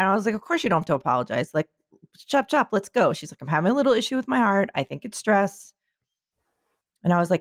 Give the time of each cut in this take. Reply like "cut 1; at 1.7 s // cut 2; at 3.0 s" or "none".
none